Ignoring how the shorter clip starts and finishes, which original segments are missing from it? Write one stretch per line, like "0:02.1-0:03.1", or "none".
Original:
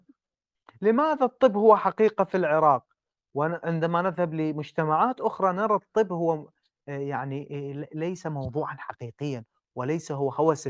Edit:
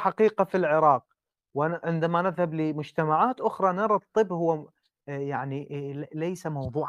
none